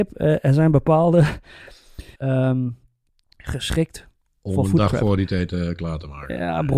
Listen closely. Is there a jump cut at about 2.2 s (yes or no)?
yes